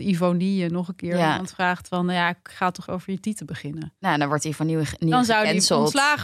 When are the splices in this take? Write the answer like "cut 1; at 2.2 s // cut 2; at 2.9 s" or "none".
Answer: cut 1; at 2.9 s